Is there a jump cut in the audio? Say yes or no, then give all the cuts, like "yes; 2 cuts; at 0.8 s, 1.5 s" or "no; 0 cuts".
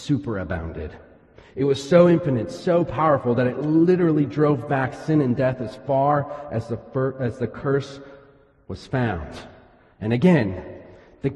no; 0 cuts